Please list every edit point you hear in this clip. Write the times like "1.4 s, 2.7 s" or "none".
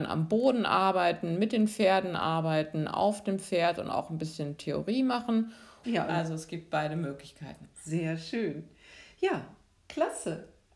5.8 s, 7.7 s

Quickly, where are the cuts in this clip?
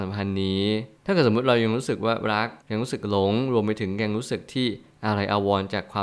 1.0 s, 2.6 s

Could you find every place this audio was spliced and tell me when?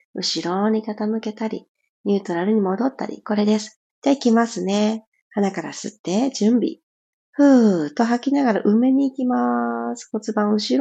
3.9 s, 7.1 s

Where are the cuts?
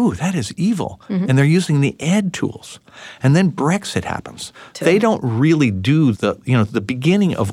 4.7 s, 6.1 s

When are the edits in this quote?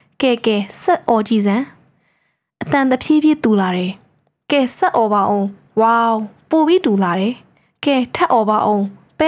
none

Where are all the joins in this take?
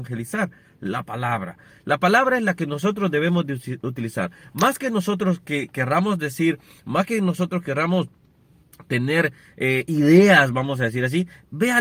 none

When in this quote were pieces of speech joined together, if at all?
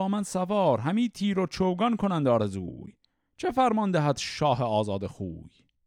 none

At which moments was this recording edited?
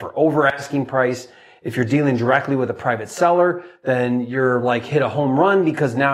none

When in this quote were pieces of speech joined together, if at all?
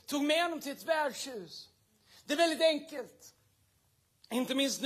none

